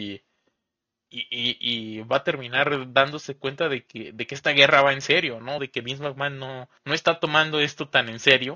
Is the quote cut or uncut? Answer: cut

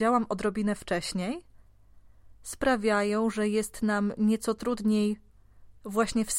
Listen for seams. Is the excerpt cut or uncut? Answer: uncut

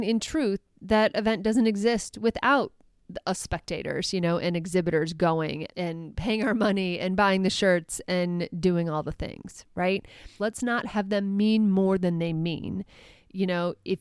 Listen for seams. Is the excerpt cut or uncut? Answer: cut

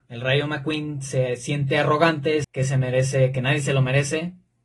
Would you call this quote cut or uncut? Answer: cut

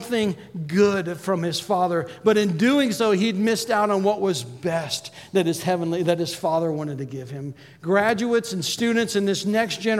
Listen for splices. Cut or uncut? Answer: uncut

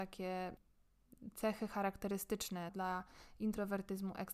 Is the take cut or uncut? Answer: cut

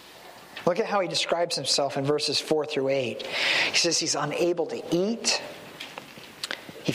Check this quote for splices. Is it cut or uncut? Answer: uncut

